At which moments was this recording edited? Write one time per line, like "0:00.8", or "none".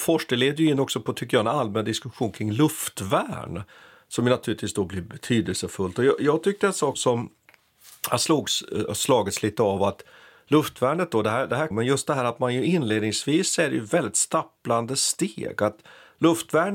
0:06.9
0:11.7